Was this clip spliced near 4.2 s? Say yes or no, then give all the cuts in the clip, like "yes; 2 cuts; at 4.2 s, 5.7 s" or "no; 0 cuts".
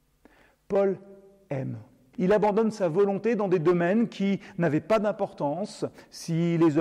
no; 1 cut; at 2.1 s